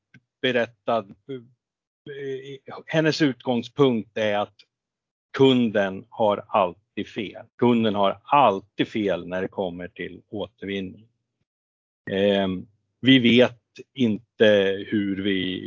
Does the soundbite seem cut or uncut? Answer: cut